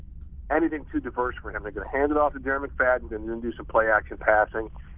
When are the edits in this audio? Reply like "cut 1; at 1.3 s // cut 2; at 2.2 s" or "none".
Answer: cut 1; at 3.1 s